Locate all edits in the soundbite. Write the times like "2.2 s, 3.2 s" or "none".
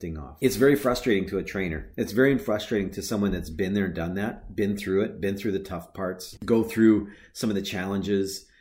6.4 s